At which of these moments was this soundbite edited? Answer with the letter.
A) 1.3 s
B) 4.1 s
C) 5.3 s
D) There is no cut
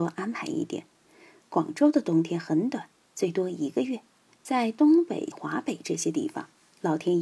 C